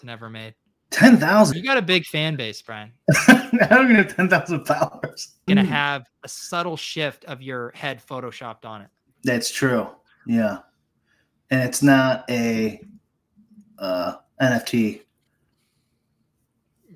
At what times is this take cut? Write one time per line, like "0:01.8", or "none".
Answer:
0:01.5
0:05.5